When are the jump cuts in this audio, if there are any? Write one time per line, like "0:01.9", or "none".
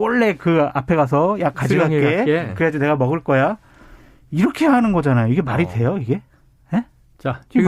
none